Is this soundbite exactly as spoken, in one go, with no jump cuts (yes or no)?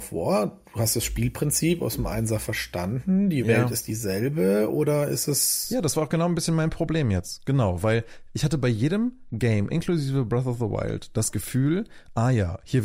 yes